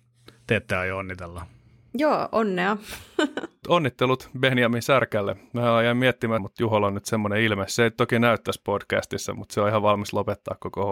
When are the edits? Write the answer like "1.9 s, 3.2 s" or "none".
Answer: 6.4 s